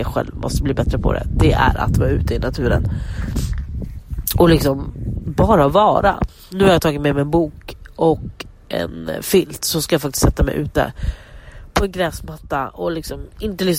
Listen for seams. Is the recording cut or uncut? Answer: uncut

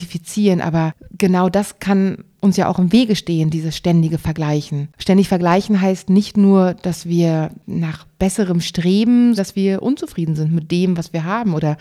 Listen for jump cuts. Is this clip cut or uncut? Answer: cut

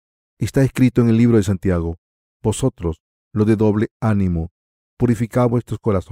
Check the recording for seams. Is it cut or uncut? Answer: uncut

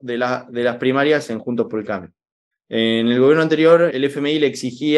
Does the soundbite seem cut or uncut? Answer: cut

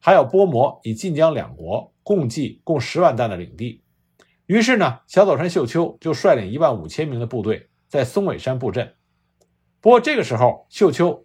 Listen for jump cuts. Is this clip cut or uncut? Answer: uncut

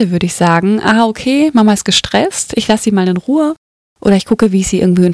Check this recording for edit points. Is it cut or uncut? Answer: uncut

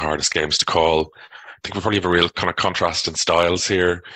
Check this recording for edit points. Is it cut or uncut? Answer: uncut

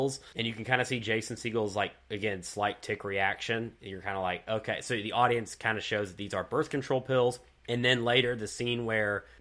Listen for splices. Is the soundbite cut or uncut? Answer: uncut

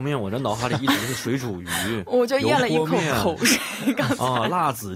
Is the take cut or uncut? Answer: uncut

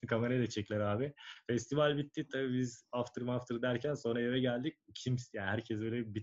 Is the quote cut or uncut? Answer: uncut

